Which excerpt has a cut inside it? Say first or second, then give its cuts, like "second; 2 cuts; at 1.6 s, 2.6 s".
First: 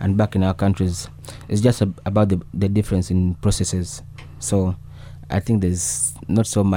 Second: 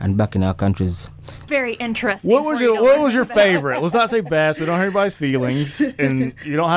second; 1 cut; at 1.5 s